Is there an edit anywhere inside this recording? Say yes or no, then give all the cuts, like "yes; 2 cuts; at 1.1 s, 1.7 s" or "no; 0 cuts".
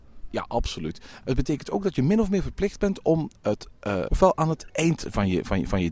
yes; 1 cut; at 4.1 s